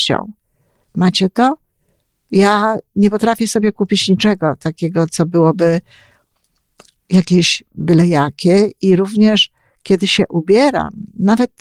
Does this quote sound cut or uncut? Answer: uncut